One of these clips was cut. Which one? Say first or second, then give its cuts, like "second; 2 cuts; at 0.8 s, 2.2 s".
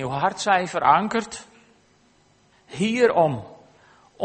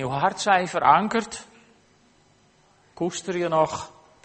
first; 1 cut; at 2.5 s